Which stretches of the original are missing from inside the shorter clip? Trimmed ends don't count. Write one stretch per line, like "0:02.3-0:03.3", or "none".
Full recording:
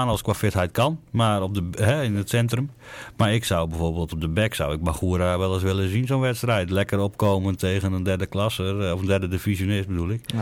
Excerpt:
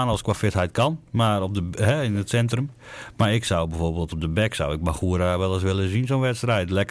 none

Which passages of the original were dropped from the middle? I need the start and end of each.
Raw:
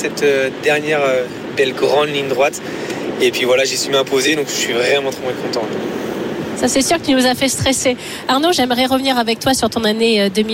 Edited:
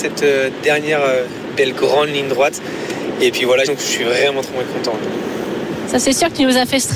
0:03.7-0:04.4

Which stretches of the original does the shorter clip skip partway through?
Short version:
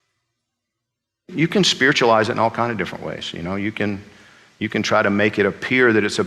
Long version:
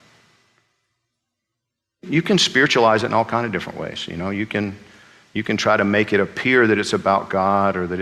none

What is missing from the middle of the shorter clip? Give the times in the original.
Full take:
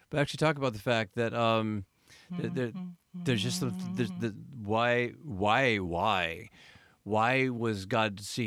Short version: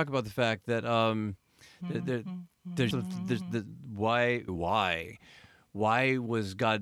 0:03.4-0:03.6
0:05.2-0:05.8

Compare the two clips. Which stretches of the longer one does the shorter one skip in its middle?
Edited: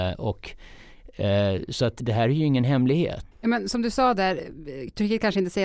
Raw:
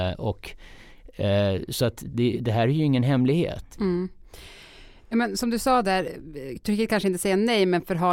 0:02.0-0:02.4
0:03.7-0:05.0

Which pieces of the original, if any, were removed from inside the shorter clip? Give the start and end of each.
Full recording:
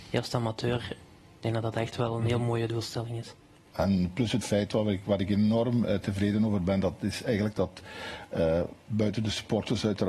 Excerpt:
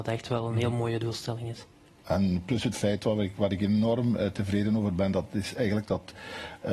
none

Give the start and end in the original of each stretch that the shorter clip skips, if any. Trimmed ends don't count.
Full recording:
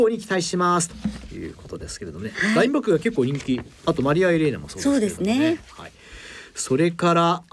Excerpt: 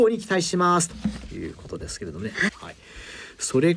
0:02.5-0:05.6

